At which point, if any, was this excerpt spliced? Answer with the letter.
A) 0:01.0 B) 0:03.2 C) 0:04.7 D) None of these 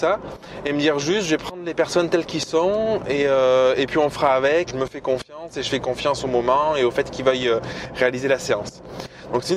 C